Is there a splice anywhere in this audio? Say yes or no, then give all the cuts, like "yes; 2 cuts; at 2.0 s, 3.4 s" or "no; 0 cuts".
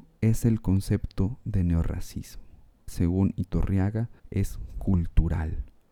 yes; 2 cuts; at 2.9 s, 4.2 s